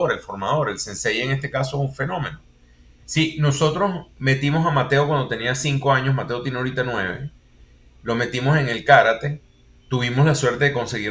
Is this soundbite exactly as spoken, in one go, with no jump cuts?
no; 1 cut; at 3.1 s

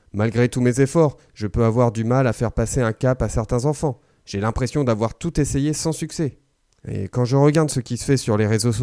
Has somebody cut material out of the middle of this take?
yes; 1 cut; at 6.7 s

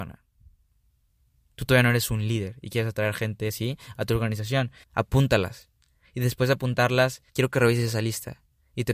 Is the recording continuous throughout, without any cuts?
no; 2 cuts; at 4.8 s, 7.3 s

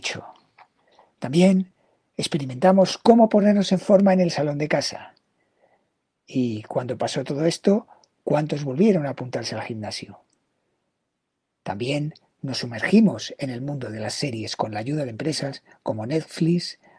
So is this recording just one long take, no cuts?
yes; 0 cuts

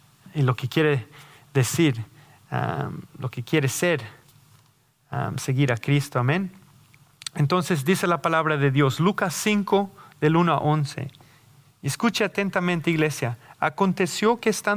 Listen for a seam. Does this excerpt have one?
no; 0 cuts

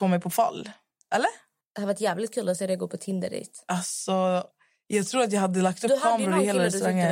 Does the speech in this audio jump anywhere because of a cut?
no; 0 cuts

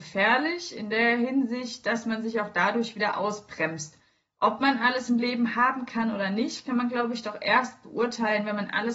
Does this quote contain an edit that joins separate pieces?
no; 0 cuts

